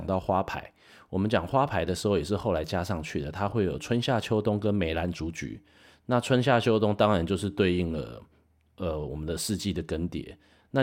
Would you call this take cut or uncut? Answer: uncut